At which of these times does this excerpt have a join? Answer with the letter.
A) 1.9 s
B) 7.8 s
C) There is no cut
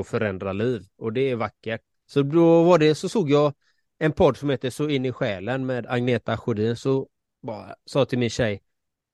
A